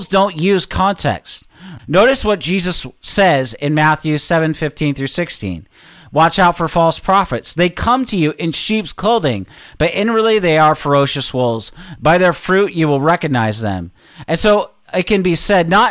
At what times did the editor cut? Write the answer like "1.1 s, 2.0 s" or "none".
1.8 s